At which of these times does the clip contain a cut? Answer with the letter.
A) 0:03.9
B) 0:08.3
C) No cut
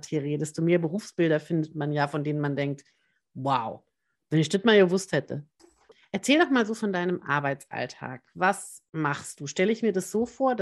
C